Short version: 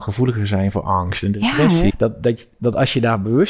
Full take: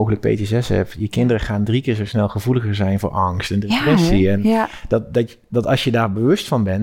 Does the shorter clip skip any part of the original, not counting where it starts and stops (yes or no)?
yes